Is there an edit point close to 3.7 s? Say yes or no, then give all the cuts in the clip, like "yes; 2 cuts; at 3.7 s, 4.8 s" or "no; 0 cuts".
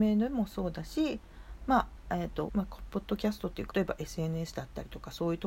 yes; 2 cuts; at 2.5 s, 3.7 s